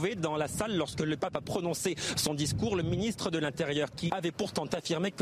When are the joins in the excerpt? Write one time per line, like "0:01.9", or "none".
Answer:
0:04.1